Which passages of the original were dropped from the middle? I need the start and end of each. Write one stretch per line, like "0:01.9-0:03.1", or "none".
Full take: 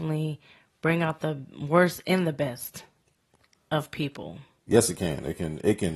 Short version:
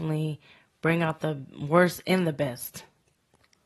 none